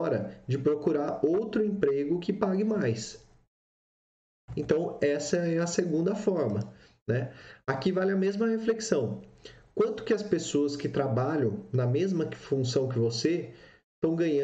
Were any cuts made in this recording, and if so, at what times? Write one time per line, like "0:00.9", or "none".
none